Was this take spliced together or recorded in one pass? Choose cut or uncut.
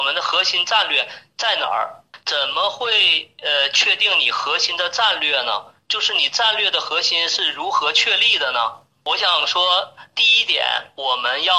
cut